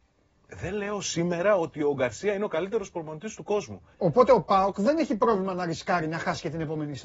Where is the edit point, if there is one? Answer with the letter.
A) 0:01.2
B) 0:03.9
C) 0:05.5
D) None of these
B